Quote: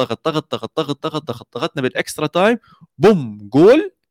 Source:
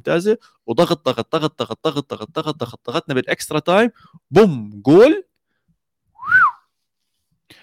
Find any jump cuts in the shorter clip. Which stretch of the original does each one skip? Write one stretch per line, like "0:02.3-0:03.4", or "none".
0:02.1-0:02.3